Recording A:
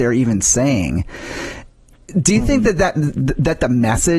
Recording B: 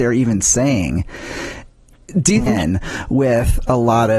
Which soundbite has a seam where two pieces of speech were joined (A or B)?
B